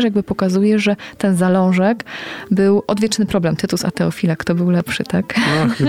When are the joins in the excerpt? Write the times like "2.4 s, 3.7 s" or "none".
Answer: none